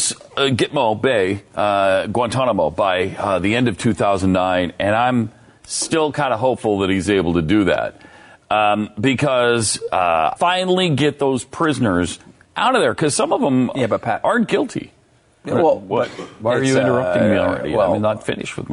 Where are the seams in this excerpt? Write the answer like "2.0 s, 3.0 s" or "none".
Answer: 10.4 s